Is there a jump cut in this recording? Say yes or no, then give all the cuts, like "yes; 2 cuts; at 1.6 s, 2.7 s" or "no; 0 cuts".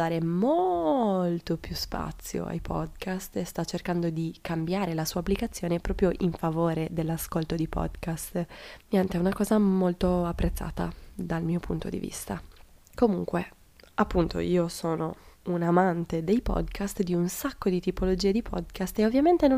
no; 0 cuts